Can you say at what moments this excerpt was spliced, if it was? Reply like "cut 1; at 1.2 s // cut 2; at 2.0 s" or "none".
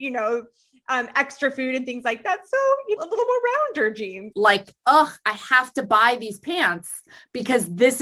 cut 1; at 3.0 s // cut 2; at 4.3 s